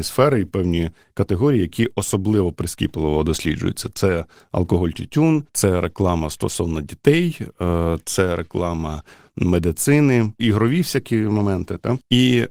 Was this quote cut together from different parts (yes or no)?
no